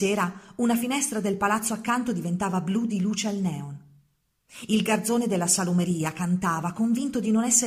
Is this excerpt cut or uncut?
uncut